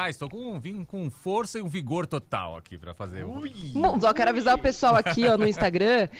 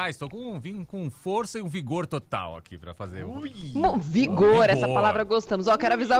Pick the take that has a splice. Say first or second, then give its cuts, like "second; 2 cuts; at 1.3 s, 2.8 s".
first; 1 cut; at 4.0 s